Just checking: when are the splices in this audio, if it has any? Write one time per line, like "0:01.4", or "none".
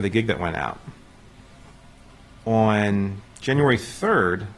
none